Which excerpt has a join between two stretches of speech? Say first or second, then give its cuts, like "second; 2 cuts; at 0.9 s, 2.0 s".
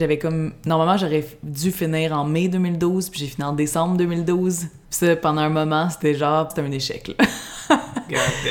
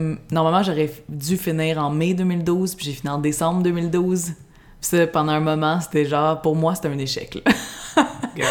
first; 2 cuts; at 4.8 s, 6.5 s